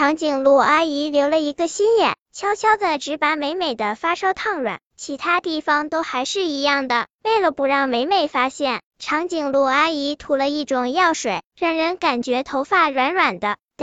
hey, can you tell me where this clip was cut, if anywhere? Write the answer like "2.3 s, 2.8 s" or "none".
none